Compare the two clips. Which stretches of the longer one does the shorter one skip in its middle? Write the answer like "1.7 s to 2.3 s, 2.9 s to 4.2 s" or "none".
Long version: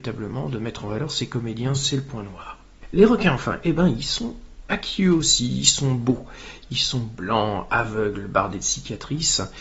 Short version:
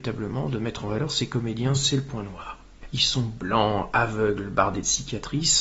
2.9 s to 6.6 s

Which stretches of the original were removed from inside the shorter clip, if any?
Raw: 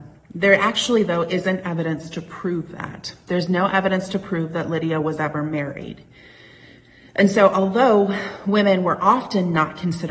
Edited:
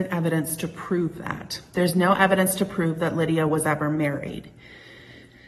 none

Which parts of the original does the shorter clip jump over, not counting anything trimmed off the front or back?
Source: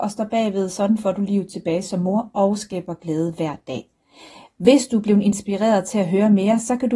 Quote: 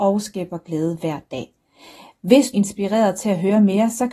4.9 s to 5.2 s

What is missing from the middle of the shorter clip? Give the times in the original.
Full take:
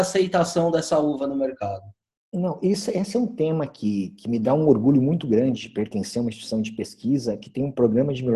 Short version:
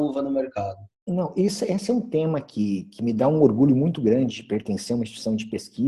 2.0 s to 2.2 s

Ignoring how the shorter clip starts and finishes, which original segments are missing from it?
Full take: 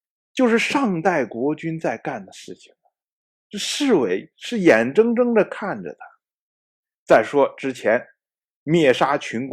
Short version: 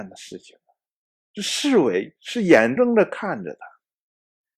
4.9 s to 5.2 s

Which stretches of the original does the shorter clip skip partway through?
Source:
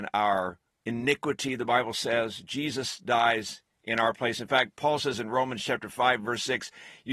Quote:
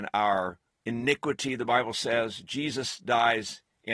none

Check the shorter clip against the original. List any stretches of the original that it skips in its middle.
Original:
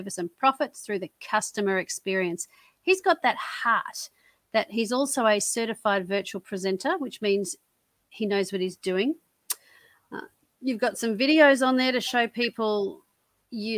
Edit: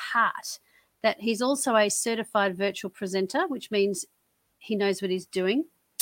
none

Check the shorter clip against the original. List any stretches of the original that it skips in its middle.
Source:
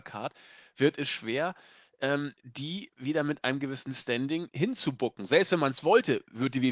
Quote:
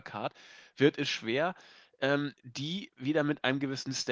none

